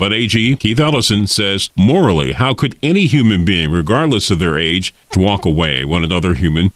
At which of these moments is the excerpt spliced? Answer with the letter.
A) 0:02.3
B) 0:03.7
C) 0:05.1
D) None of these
C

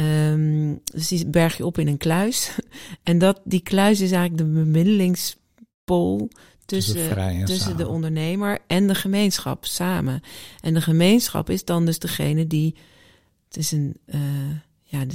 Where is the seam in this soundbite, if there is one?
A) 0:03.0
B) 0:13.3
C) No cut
B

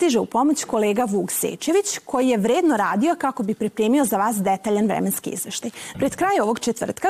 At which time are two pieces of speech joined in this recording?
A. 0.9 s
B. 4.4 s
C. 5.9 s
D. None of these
C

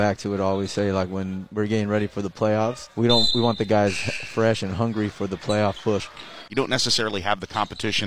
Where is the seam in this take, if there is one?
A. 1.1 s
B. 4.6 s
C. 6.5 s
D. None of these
C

